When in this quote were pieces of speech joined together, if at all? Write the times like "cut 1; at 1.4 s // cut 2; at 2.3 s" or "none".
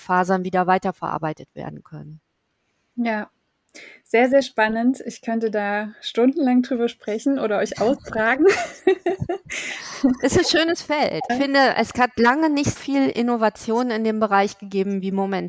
cut 1; at 11.3 s // cut 2; at 12.8 s